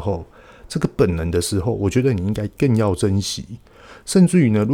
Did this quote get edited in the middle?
no; 0 cuts

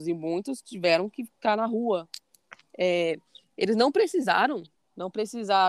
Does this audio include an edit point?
yes; 2 cuts; at 2.6 s, 4.7 s

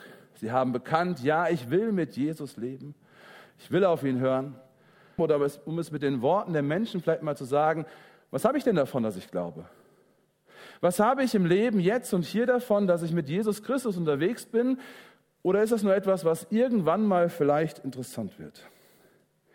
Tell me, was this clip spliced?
yes; 1 cut; at 5.2 s

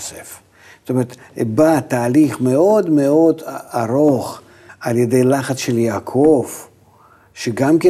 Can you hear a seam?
yes; 1 cut; at 4.7 s

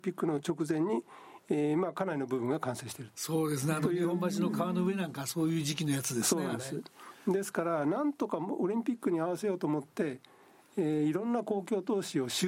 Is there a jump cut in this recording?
no; 0 cuts

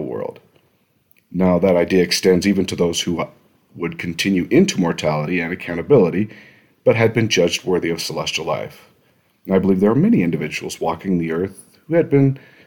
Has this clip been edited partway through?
no; 0 cuts

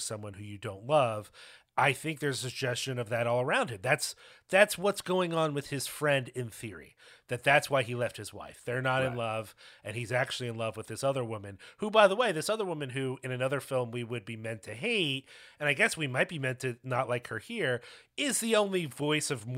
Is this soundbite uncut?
yes; 0 cuts

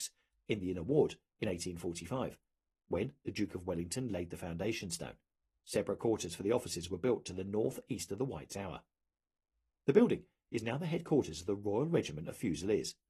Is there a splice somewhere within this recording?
yes; 1 cut; at 5.6 s

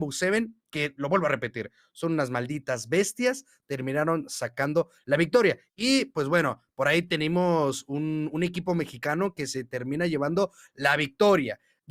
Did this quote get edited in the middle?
yes; 1 cut; at 5.7 s

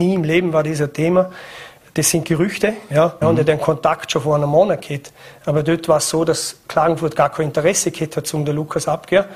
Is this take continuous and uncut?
no; 1 cut; at 3.2 s

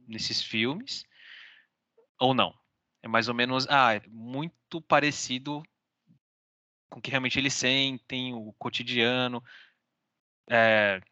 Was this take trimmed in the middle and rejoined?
yes; 1 cut; at 4.0 s

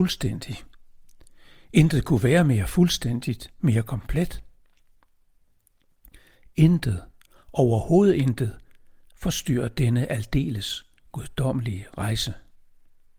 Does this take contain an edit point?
no; 0 cuts

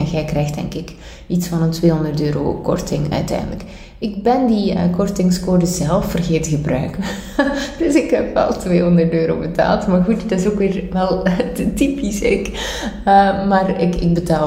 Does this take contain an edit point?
no; 0 cuts

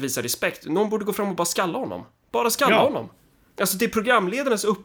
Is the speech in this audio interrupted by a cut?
no; 0 cuts

